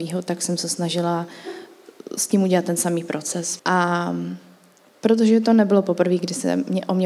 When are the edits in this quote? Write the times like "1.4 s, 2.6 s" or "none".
3.6 s